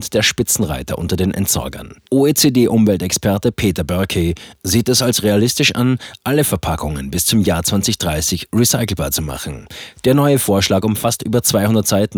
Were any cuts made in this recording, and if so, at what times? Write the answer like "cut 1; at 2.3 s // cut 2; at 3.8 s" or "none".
cut 1; at 2.0 s // cut 2; at 10.0 s